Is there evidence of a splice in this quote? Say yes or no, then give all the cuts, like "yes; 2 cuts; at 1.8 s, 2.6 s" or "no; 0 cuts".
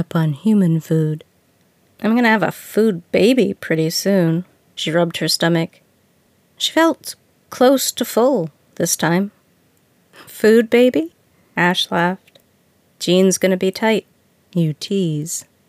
no; 0 cuts